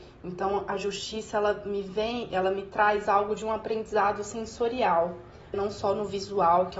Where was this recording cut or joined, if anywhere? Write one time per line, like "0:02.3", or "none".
0:05.5